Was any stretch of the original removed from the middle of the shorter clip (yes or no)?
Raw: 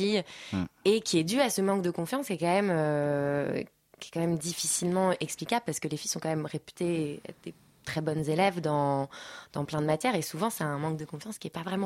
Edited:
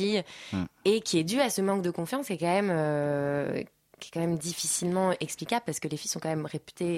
no